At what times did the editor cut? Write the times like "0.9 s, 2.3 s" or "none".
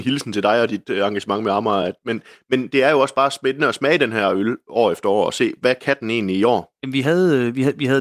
none